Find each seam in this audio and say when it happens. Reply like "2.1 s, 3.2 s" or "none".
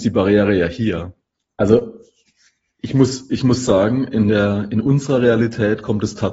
1.5 s

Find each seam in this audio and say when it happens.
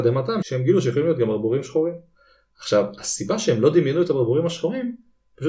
none

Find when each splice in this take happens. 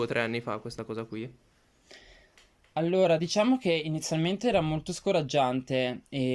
none

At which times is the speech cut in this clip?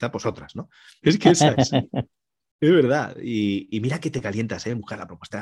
1.0 s

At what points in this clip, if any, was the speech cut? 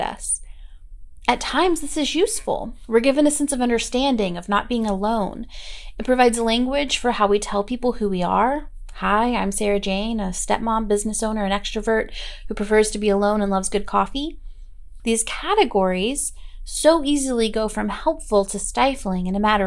15.0 s

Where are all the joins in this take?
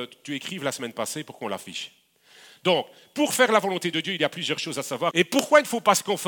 5.1 s

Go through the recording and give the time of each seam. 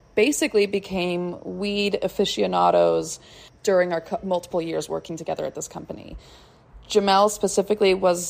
none

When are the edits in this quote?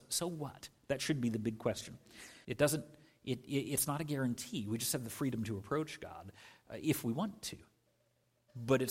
2.4 s

